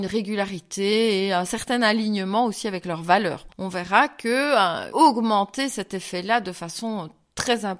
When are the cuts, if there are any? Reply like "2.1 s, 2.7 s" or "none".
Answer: 3.5 s, 4.9 s